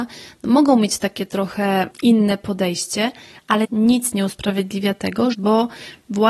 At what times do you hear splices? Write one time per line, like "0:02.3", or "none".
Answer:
0:03.6
0:05.3